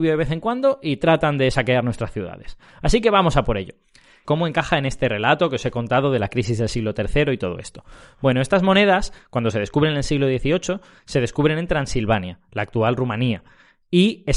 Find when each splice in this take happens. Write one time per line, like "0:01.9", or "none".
0:04.2